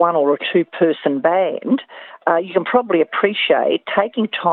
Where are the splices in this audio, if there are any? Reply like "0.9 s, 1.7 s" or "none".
none